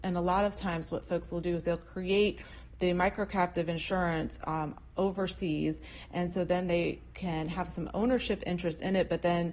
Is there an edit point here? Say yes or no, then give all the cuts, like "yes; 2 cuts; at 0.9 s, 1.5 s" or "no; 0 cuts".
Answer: no; 0 cuts